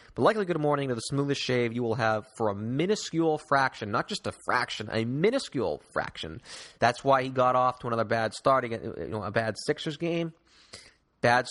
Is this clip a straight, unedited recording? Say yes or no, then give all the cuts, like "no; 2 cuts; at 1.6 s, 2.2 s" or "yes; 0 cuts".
no; 1 cut; at 6.8 s